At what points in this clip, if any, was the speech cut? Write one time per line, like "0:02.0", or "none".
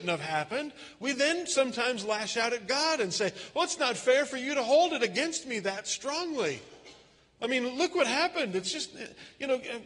none